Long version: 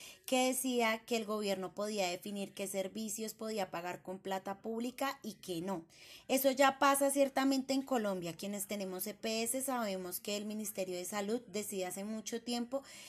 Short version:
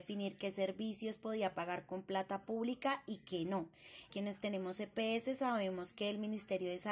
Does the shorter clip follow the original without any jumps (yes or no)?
no